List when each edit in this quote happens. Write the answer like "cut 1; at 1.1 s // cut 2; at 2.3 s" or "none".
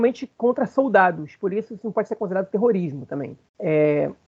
none